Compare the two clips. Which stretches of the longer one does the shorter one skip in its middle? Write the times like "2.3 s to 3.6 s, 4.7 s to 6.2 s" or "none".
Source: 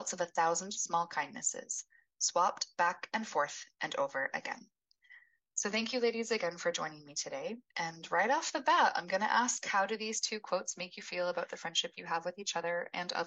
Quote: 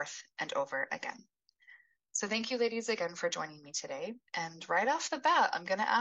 none